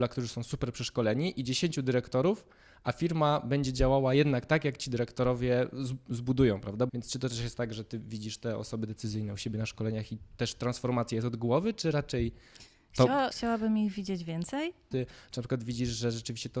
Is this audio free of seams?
no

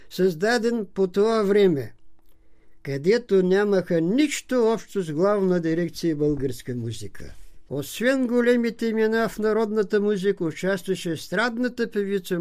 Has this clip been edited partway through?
yes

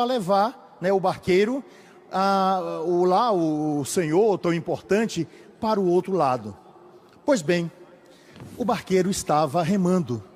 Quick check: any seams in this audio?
no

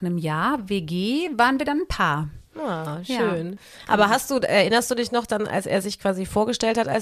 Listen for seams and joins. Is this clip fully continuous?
yes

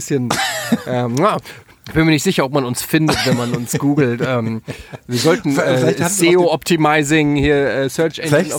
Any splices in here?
no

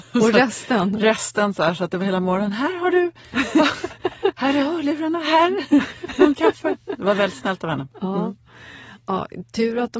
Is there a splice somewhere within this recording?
no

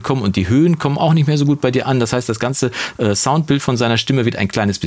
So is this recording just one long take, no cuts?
yes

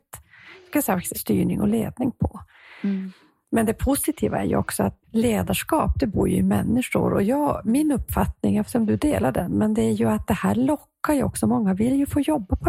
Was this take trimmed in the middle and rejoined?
yes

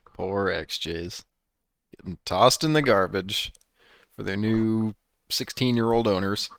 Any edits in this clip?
no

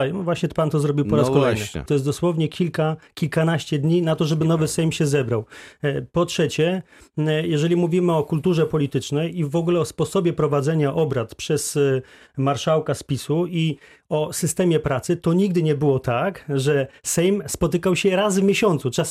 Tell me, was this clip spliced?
yes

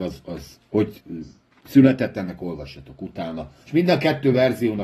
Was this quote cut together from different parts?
yes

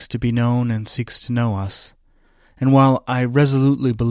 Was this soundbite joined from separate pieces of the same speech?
no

